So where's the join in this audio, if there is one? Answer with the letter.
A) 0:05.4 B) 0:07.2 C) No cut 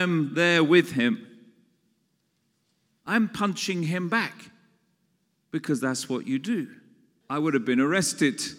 B